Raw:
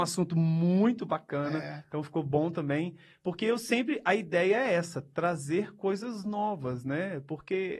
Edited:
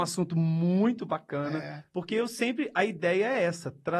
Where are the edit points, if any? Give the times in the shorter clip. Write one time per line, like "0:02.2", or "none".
0:01.9